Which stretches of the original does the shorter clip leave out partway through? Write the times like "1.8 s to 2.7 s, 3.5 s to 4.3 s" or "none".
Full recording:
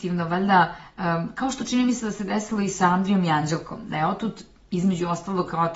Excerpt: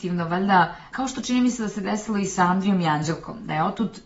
0.9 s to 1.3 s